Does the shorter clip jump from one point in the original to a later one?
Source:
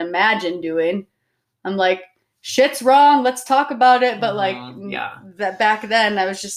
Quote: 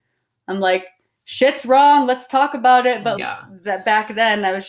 yes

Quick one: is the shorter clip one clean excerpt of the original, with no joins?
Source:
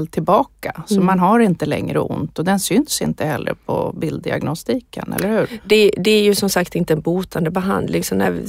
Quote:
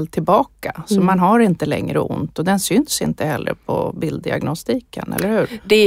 yes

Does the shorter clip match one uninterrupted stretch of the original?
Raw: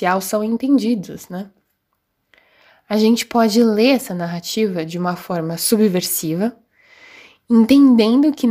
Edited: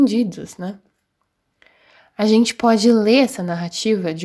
yes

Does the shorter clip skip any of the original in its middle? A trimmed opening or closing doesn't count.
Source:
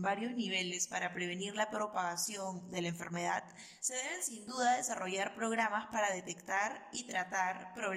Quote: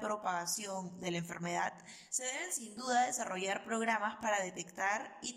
no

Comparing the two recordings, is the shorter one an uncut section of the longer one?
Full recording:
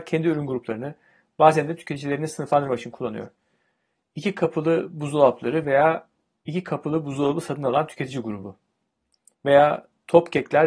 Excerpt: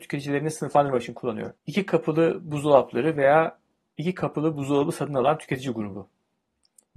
no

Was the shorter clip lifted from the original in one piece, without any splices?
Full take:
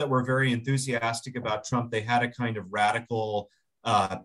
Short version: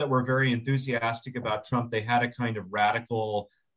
yes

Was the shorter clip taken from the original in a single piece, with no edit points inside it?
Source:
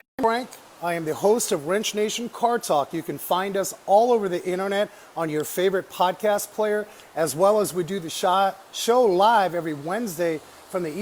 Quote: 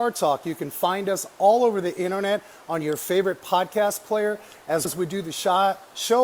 no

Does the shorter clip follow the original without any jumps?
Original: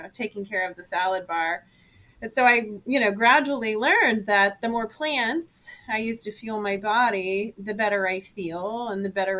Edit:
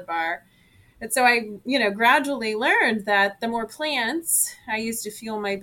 yes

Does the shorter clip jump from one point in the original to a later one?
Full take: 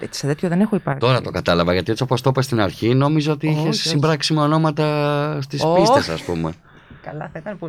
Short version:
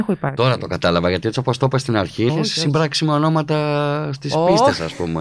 yes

